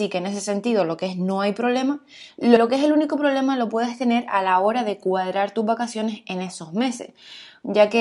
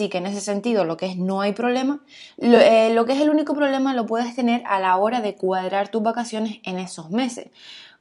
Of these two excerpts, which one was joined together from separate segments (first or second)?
first